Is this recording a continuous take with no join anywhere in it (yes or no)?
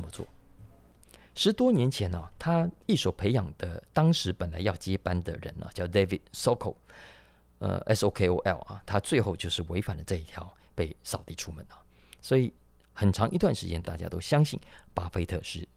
yes